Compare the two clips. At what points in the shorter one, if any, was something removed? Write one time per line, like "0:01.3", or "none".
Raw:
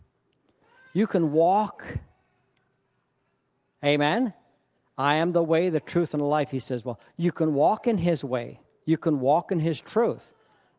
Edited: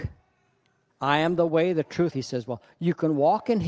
0:00.9
0:02.1

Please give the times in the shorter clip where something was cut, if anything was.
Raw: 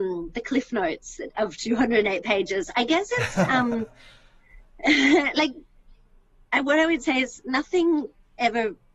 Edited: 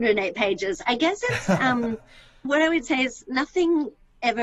0:02.4

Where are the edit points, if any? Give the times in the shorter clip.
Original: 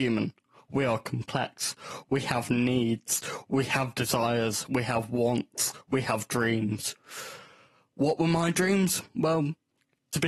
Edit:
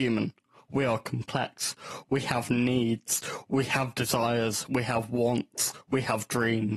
none

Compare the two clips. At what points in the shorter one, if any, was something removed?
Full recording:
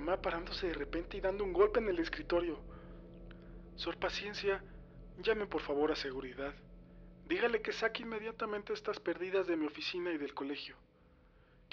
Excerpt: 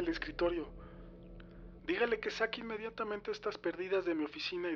0:01.8

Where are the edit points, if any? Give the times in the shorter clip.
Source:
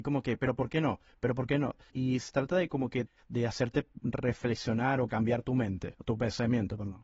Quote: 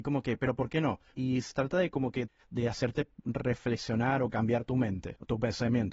0:01.1

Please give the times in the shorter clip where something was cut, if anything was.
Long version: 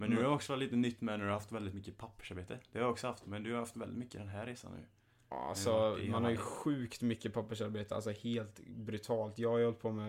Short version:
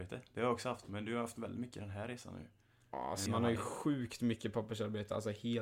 0:03.3

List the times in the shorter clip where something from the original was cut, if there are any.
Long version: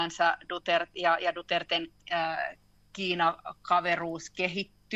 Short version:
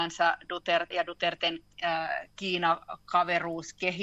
0:00.9
0:02.3

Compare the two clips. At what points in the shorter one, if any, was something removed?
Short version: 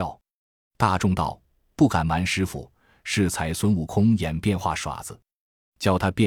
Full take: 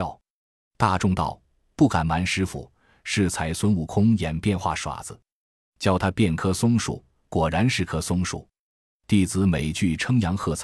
none

